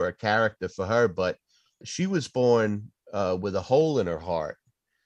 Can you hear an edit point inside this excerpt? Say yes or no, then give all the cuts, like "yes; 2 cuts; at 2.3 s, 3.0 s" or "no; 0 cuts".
yes; 1 cut; at 1.8 s